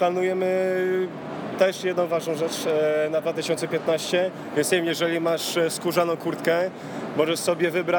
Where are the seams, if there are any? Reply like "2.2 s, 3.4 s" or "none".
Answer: 4.5 s